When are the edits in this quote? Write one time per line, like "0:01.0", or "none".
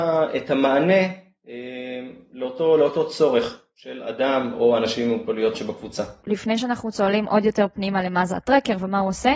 0:06.2